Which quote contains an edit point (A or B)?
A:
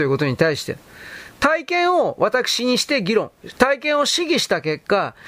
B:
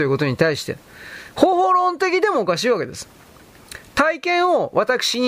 A